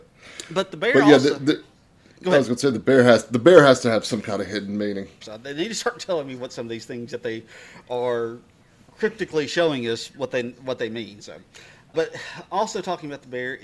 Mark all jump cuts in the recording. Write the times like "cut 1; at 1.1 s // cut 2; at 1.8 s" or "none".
cut 1; at 5.2 s // cut 2; at 11.9 s